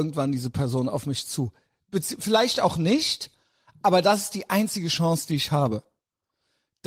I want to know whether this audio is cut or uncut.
uncut